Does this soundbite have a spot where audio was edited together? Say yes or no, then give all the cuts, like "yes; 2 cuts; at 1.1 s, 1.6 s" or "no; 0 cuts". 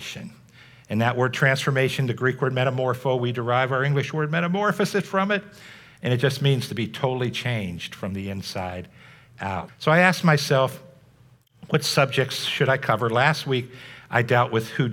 yes; 1 cut; at 9.7 s